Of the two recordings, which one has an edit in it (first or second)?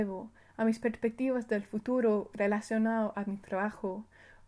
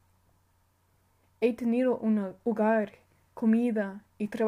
second